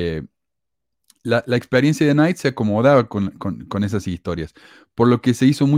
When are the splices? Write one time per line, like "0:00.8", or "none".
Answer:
none